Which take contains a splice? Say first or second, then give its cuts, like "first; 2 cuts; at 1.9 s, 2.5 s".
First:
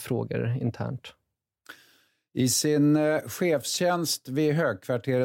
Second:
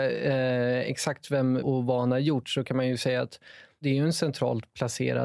second; 1 cut; at 1.6 s